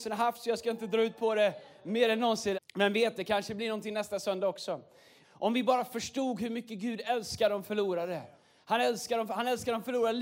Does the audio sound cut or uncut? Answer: cut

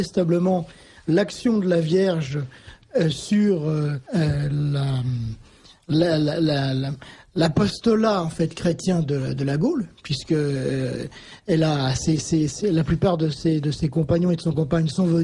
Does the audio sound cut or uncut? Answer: cut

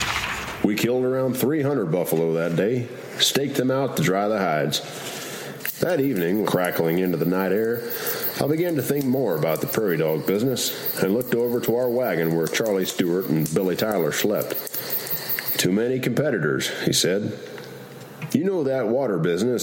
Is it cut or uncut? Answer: cut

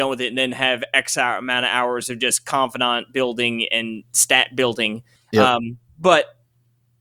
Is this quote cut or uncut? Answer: cut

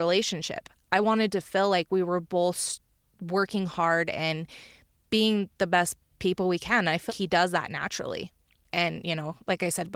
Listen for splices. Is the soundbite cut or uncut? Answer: cut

